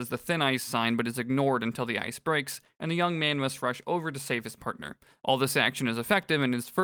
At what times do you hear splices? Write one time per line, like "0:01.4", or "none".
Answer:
none